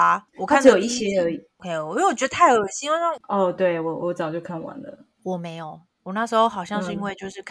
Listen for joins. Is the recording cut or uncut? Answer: cut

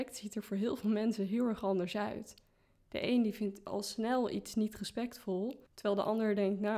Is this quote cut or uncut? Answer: uncut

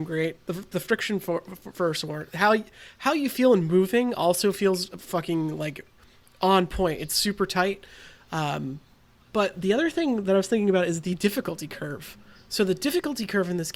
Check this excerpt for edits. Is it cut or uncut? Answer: uncut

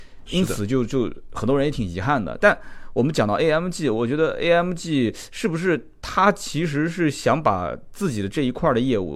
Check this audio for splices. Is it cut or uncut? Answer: uncut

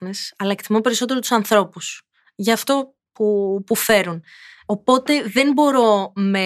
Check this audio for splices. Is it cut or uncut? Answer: uncut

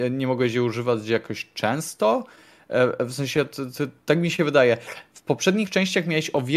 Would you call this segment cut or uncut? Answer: uncut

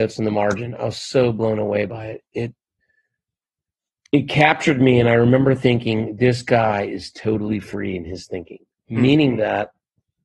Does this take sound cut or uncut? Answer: uncut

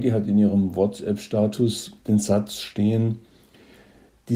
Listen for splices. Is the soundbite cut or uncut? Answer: cut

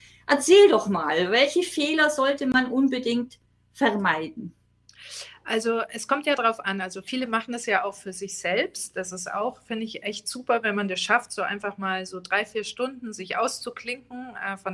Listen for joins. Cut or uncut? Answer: uncut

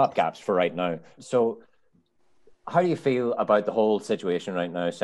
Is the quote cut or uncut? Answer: cut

